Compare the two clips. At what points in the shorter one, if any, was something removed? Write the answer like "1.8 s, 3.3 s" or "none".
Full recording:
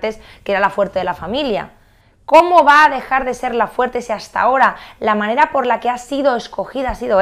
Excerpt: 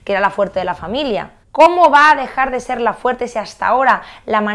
1.4 s